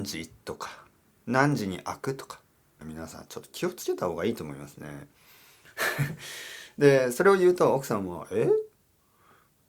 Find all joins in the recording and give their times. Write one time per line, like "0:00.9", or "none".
0:01.1
0:02.8